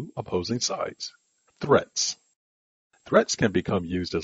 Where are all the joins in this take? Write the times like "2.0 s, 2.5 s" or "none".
1.5 s

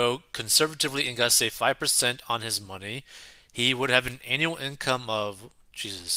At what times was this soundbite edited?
none

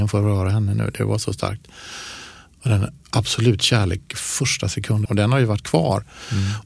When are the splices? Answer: 5.1 s

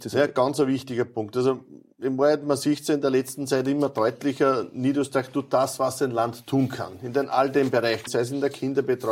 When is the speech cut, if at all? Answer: 8.1 s

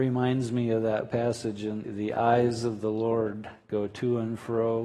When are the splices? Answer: 1.8 s

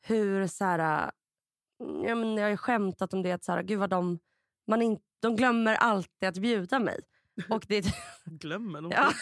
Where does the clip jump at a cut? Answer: 5.2 s

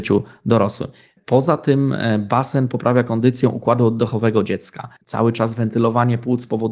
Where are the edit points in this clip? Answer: 5.0 s

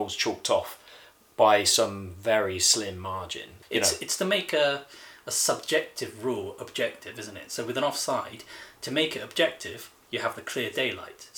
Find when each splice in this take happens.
3.6 s

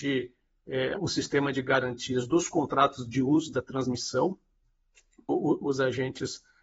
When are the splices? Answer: 1.0 s, 5.3 s

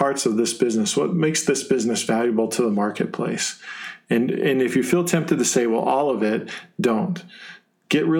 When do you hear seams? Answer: none

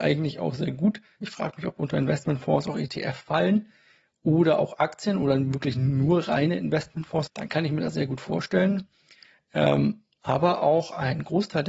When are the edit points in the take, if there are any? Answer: 1.2 s, 7.3 s

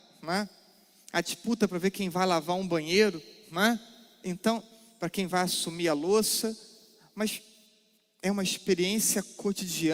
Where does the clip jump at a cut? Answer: none

